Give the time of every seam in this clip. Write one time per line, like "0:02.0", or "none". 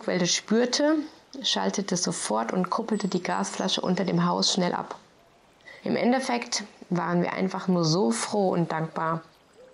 0:05.8